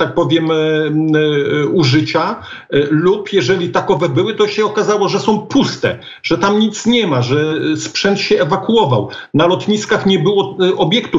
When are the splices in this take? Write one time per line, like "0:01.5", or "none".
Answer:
none